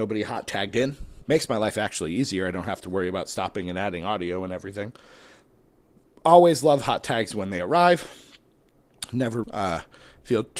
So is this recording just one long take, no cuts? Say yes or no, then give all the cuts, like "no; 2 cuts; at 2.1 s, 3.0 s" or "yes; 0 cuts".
no; 2 cuts; at 1.2 s, 9.4 s